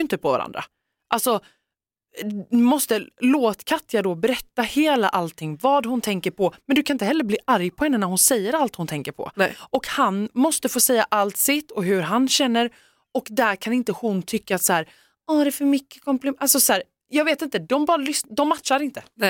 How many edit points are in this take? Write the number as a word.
zero